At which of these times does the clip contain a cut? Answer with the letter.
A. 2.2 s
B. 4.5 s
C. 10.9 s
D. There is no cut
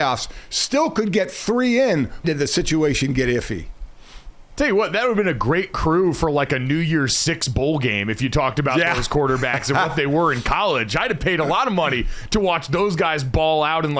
A